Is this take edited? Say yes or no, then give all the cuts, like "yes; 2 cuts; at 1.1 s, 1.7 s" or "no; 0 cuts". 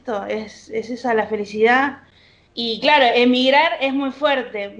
yes; 1 cut; at 2.5 s